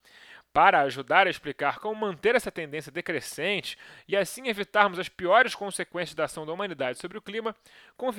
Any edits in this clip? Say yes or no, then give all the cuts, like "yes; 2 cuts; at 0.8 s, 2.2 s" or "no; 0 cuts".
no; 0 cuts